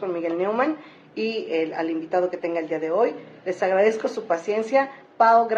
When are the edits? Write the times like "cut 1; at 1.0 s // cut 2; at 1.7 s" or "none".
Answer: none